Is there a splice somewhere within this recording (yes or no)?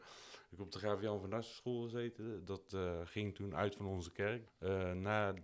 yes